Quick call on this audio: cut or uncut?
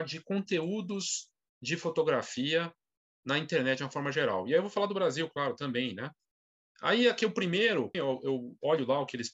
cut